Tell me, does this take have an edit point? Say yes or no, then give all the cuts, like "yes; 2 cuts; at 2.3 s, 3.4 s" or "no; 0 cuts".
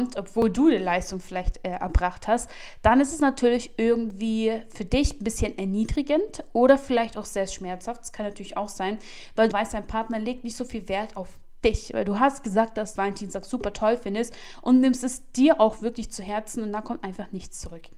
yes; 2 cuts; at 9.5 s, 13.0 s